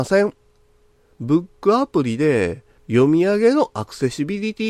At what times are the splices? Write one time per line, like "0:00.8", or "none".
0:01.1